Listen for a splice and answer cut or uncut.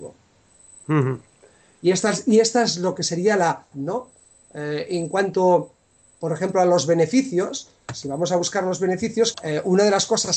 cut